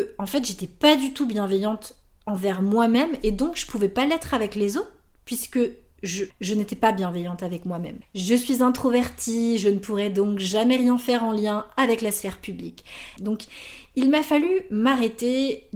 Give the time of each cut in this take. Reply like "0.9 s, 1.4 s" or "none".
6.3 s, 8.0 s, 13.2 s